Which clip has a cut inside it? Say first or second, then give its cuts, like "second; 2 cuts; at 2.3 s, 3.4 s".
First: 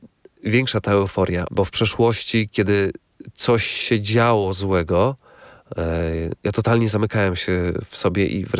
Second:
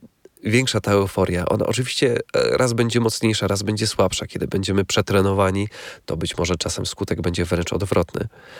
first; 1 cut; at 1.4 s